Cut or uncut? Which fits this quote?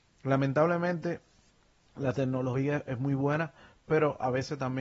uncut